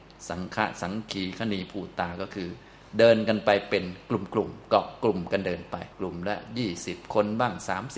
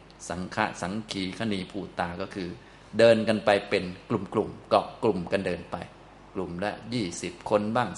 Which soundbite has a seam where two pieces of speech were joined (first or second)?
first